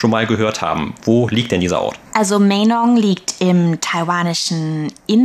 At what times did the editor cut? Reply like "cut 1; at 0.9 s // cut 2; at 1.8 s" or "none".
cut 1; at 2.1 s